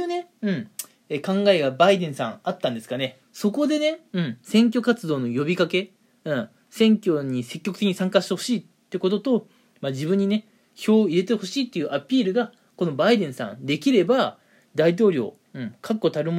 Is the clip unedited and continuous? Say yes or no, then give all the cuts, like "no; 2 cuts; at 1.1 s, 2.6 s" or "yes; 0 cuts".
no; 1 cut; at 3.2 s